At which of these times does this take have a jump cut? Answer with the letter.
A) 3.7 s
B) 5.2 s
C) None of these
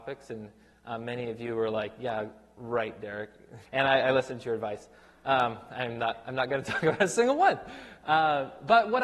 A